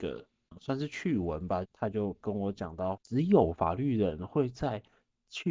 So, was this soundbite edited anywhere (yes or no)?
yes